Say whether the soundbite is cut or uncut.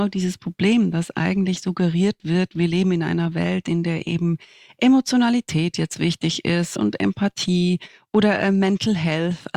uncut